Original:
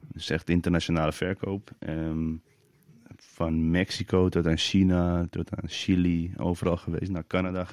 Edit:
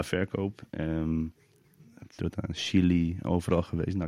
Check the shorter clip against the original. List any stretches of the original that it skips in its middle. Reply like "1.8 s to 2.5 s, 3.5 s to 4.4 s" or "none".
3.3 s to 5.3 s